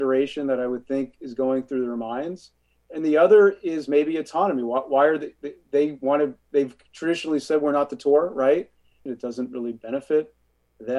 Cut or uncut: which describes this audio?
cut